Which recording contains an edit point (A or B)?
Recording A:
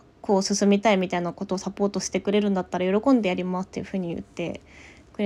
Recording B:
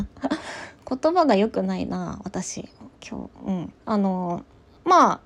B